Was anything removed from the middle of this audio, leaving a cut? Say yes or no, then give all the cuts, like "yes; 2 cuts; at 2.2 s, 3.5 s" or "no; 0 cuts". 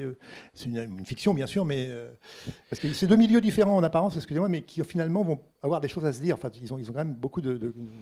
yes; 1 cut; at 5.5 s